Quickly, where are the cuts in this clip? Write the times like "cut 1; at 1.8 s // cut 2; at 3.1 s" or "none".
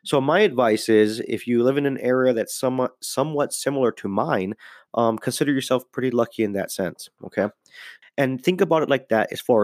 cut 1; at 8.0 s